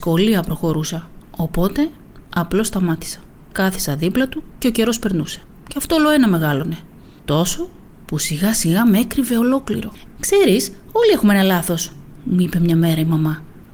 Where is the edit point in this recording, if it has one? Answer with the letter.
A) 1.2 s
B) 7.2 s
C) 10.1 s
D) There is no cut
D